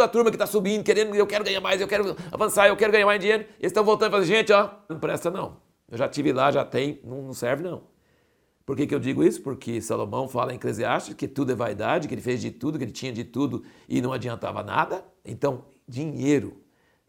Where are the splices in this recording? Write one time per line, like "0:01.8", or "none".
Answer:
0:04.9
0:15.2